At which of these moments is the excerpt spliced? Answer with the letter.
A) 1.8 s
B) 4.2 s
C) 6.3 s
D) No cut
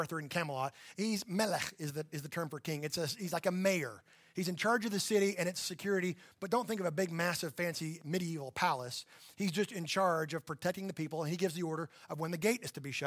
D